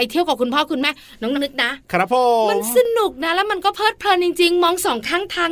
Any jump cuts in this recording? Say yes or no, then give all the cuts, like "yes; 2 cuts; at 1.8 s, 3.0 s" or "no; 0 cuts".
yes; 1 cut; at 1.3 s